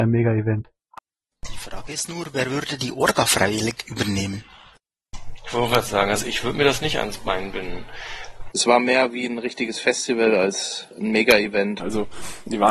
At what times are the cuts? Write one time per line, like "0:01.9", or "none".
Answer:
0:08.5
0:11.8